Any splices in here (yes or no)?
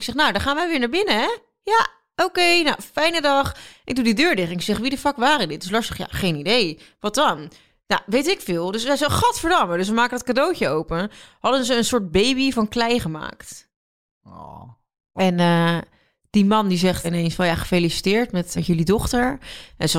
yes